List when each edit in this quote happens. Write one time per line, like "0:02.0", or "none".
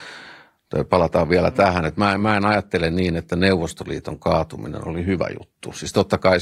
none